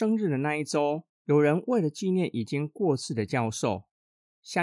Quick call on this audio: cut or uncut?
cut